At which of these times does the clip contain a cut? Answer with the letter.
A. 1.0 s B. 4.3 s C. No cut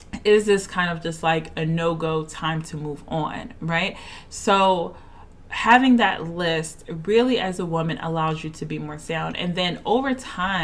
C